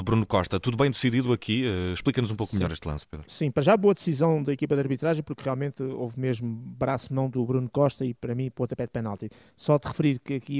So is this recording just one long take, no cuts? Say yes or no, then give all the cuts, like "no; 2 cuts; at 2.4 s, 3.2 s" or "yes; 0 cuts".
yes; 0 cuts